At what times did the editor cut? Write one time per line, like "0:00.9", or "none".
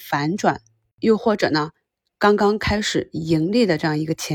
none